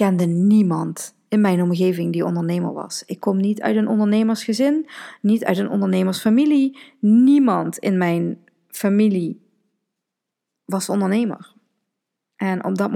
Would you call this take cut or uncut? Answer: uncut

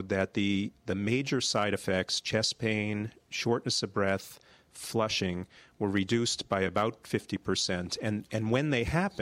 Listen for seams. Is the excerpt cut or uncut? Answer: uncut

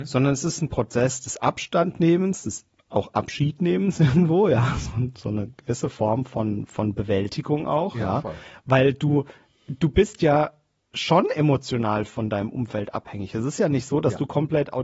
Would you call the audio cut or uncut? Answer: uncut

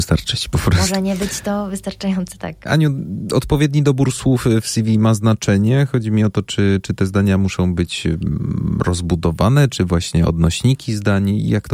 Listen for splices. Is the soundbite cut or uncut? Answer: uncut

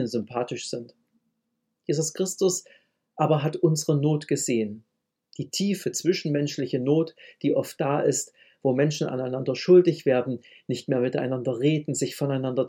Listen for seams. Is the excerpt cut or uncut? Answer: uncut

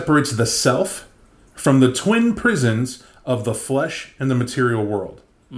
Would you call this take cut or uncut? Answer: uncut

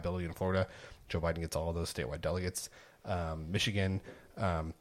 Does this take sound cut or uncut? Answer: uncut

